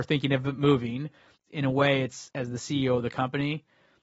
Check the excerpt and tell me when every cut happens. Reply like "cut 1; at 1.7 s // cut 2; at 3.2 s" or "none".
cut 1; at 1.3 s